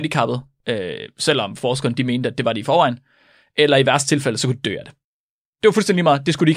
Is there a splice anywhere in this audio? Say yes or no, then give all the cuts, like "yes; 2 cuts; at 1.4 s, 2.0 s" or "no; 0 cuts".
no; 0 cuts